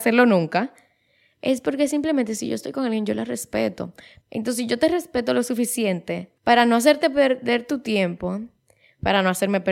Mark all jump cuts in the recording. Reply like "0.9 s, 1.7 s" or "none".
4.2 s, 6.4 s